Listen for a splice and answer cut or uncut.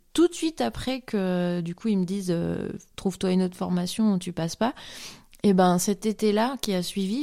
uncut